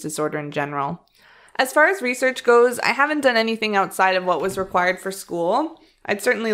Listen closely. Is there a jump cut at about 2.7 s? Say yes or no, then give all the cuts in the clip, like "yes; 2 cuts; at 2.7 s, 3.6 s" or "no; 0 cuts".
no; 1 cut; at 1.5 s